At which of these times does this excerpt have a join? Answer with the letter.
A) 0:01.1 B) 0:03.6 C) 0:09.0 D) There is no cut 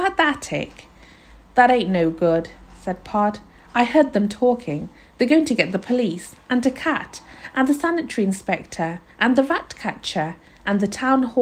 D